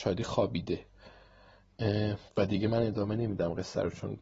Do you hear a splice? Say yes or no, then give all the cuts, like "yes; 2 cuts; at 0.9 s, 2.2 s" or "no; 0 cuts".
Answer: yes; 1 cut; at 2.3 s